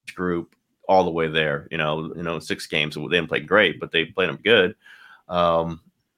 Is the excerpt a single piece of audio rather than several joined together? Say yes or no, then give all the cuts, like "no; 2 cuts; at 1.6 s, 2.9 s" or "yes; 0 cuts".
no; 2 cuts; at 2.1 s, 4.4 s